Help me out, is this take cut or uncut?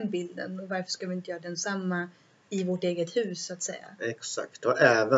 uncut